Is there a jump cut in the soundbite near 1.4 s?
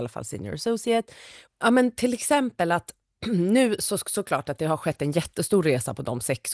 yes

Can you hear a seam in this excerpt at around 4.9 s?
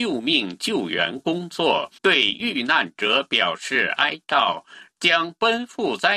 yes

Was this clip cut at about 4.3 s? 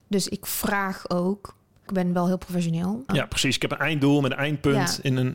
no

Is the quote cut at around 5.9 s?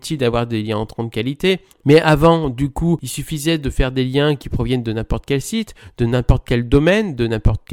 no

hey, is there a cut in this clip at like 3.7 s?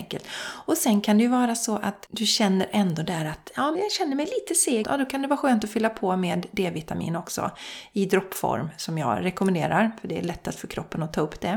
yes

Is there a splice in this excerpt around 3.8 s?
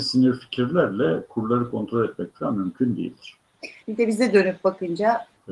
yes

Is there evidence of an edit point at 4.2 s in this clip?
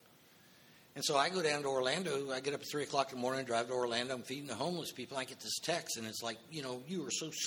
no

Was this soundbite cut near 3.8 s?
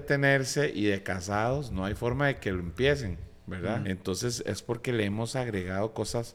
yes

